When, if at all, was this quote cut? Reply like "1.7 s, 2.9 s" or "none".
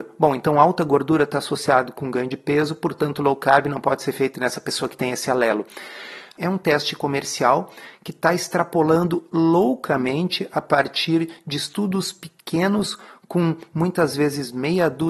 6.4 s